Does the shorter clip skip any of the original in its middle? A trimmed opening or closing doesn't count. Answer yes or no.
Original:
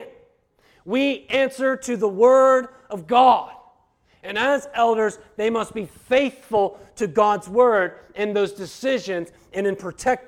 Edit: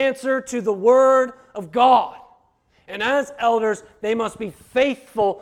no